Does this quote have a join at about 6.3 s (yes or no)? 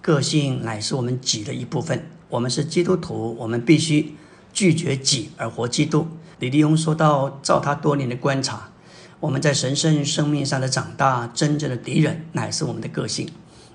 yes